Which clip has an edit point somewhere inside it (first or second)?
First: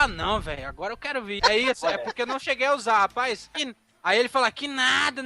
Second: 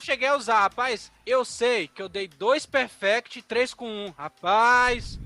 first